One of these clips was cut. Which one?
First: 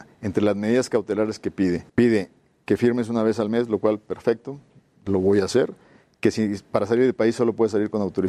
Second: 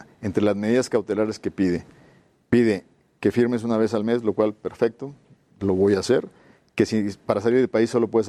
first; 1 cut; at 1.9 s

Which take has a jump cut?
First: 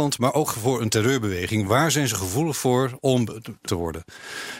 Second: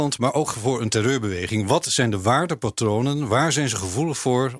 first; 2 cuts; at 1.7 s, 3.7 s

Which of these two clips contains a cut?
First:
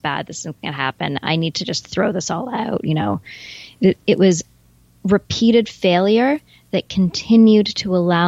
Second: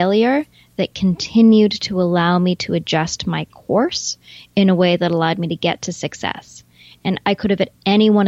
first; 1 cut; at 4.0 s

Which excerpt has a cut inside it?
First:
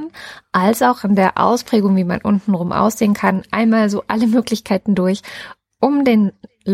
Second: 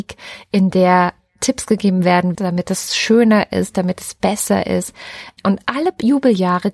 second; 1 cut; at 2.3 s

